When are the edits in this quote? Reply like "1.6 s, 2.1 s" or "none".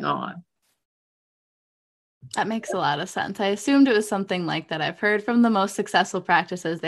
none